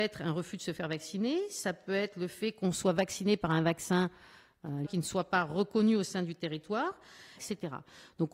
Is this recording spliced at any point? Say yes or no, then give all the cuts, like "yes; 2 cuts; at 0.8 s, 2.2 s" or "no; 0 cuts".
yes; 2 cuts; at 4.8 s, 7.4 s